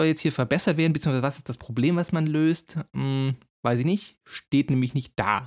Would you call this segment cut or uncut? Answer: uncut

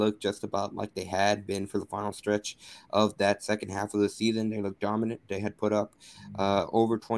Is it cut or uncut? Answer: uncut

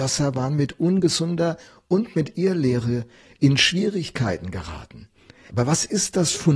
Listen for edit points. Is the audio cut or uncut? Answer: cut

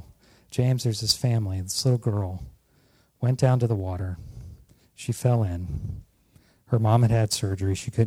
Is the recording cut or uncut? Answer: uncut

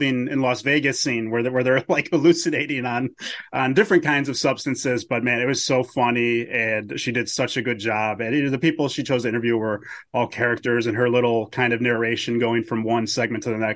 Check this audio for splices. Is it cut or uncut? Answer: uncut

